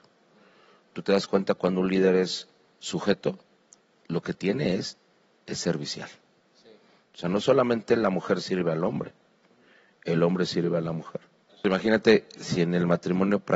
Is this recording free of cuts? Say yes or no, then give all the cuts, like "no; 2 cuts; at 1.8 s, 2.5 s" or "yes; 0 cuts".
no; 2 cuts; at 6.4 s, 11.5 s